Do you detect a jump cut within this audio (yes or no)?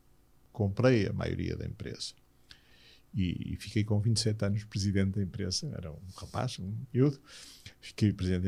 no